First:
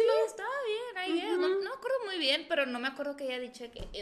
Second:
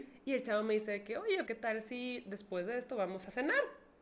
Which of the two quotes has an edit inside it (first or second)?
second